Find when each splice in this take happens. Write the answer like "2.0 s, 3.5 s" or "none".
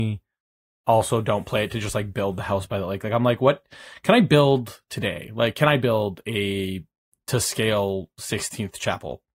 none